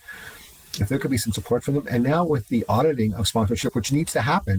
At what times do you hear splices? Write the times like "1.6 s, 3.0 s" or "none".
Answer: none

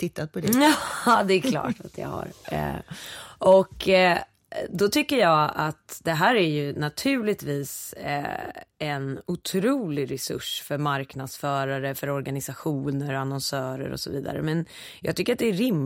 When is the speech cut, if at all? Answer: none

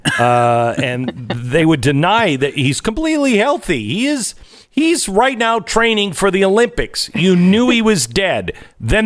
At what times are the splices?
none

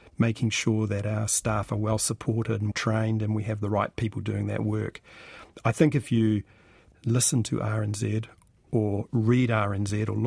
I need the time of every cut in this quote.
2.7 s

